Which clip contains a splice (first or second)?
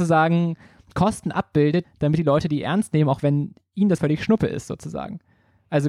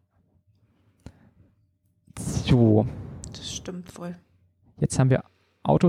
first